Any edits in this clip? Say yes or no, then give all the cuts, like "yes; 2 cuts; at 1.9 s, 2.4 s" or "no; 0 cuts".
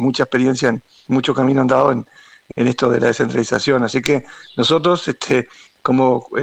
no; 0 cuts